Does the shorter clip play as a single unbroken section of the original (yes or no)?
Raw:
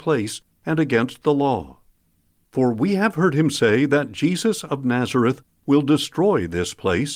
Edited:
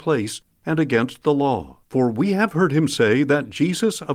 no